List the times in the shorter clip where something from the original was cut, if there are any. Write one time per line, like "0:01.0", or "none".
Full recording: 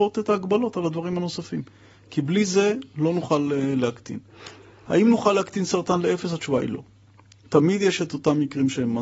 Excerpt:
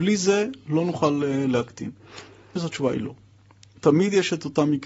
0:02.6